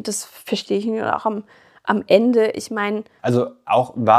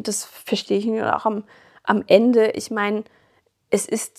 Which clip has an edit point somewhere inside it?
first; 1 cut; at 3.2 s

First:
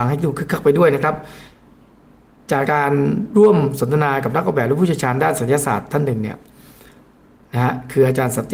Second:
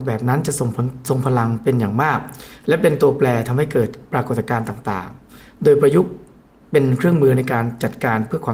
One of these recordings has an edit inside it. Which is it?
first; 1 cut; at 2.6 s

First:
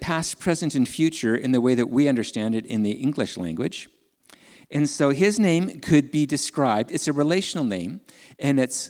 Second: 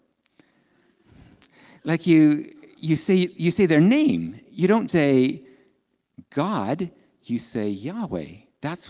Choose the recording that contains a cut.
second; 1 cut; at 4.9 s

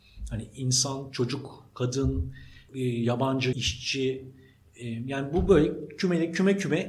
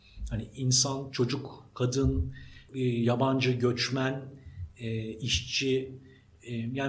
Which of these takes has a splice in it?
first; 1 cut; at 3.5 s

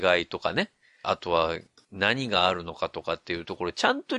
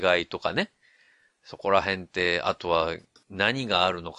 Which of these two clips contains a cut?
first; 1 cut; at 1.0 s

